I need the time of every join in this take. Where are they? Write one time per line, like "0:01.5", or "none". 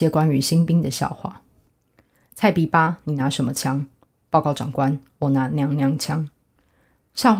none